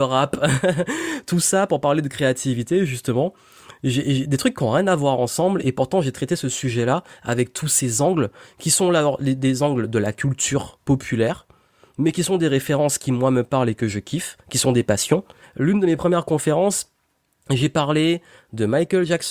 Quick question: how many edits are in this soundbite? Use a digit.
1